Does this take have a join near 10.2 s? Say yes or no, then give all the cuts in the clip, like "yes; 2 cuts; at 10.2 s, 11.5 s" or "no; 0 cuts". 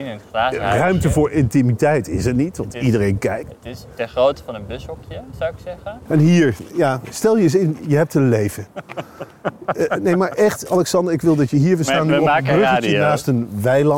no; 1 cut; at 6.1 s